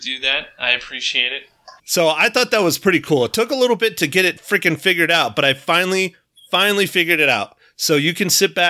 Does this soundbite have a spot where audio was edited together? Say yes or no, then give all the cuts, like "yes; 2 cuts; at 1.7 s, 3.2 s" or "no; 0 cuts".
yes; 1 cut; at 1.8 s